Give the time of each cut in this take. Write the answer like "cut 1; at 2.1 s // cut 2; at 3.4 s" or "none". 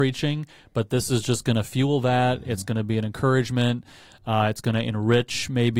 none